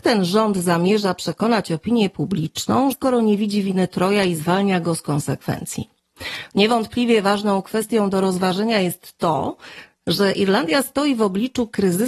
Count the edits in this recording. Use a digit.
2